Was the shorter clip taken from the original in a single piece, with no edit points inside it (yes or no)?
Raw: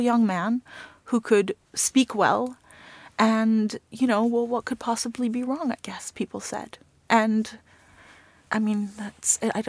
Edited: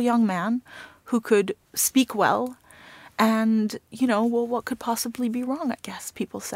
yes